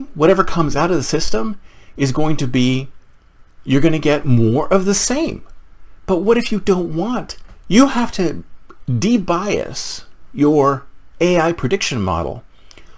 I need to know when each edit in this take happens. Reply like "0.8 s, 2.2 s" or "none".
7.6 s

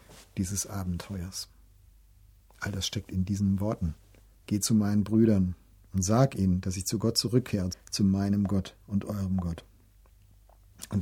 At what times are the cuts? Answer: 4.4 s, 7.7 s

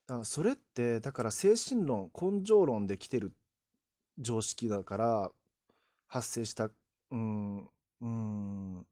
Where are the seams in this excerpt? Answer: 8.0 s

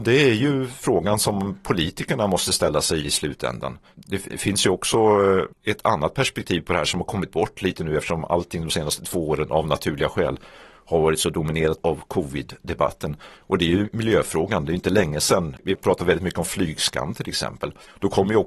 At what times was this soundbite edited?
none

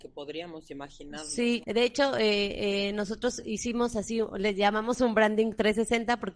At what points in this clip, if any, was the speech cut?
1.6 s

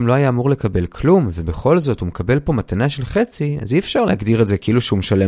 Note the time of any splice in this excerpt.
none

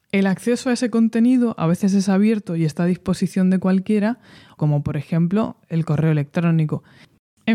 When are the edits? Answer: 4.6 s

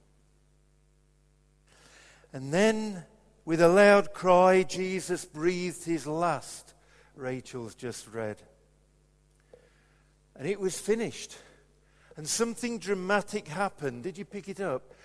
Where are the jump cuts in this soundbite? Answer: none

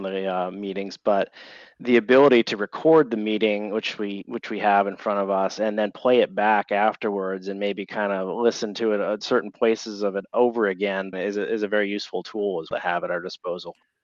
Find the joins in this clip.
11.1 s, 12.7 s

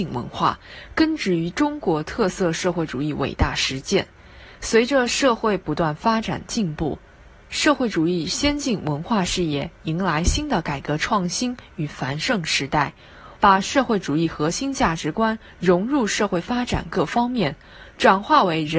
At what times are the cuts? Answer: 13.4 s

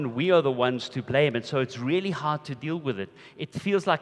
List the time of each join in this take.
none

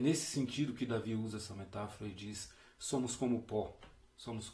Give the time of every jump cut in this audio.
none

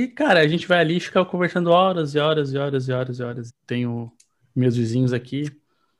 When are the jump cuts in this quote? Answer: 3.5 s

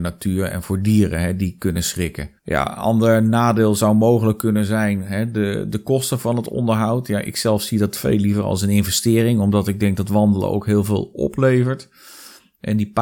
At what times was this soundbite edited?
2.4 s

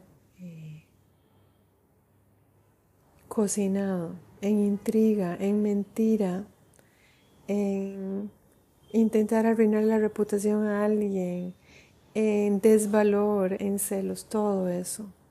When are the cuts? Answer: 13.6 s

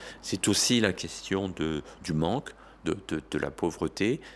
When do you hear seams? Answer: none

